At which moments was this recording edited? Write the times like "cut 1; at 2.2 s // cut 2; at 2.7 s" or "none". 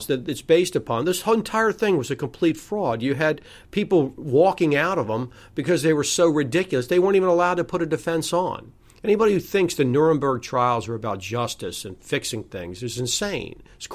none